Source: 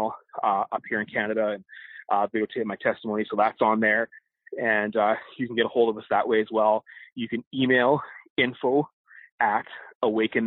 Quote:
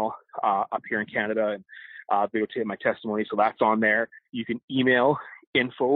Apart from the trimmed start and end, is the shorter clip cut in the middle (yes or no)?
yes